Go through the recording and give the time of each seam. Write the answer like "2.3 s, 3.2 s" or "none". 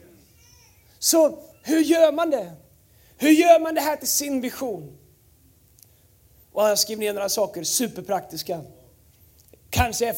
none